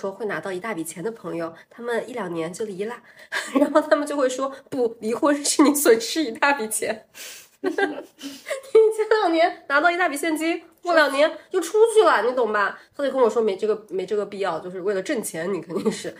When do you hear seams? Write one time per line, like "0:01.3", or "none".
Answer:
none